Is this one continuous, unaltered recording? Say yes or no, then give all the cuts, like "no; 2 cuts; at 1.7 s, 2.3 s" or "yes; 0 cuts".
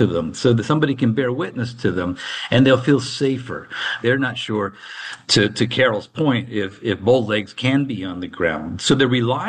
no; 1 cut; at 4.0 s